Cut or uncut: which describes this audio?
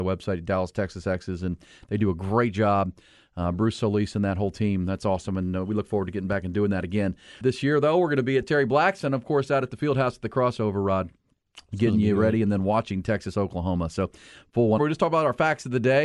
cut